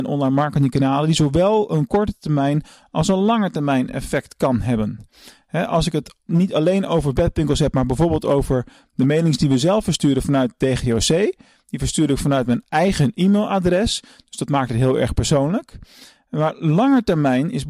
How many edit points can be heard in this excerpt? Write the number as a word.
zero